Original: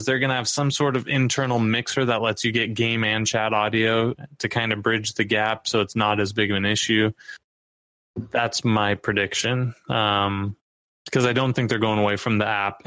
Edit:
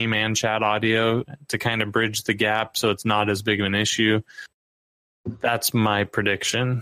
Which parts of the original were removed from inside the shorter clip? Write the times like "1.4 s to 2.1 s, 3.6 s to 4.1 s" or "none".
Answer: none